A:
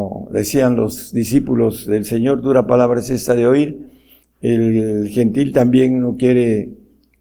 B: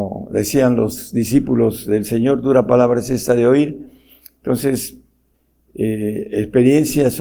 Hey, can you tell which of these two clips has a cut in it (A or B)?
A